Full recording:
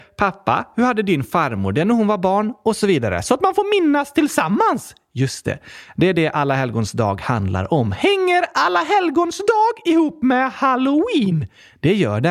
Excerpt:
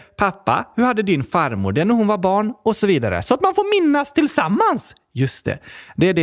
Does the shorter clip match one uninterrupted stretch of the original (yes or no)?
yes